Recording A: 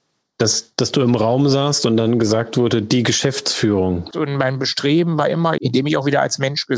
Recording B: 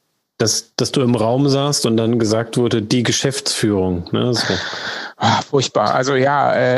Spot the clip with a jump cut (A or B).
A